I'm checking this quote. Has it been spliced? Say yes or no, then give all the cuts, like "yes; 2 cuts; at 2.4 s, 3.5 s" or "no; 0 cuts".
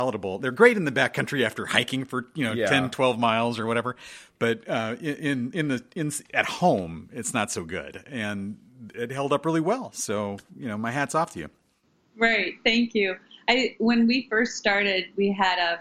no; 0 cuts